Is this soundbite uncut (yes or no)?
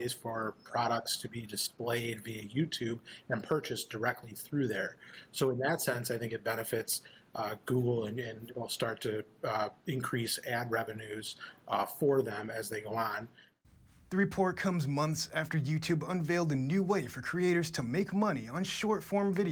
yes